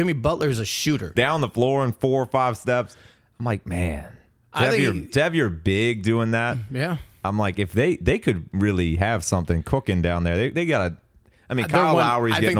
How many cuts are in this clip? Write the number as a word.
one